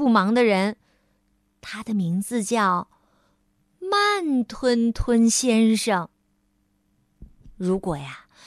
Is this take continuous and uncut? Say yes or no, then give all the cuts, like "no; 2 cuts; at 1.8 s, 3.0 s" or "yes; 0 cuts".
yes; 0 cuts